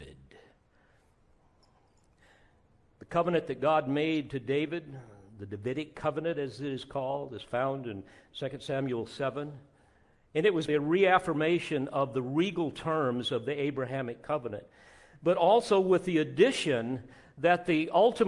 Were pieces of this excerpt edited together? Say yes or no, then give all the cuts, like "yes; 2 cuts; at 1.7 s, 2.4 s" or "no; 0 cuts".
yes; 1 cut; at 10.7 s